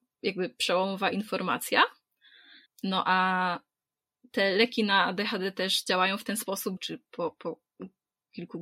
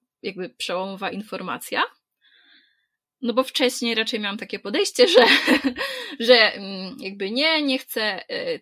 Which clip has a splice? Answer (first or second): first